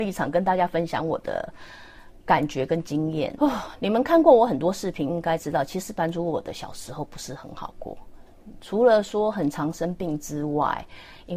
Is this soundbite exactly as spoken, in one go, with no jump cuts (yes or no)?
no